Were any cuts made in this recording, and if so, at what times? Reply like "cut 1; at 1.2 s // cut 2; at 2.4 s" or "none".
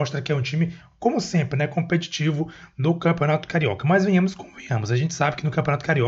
none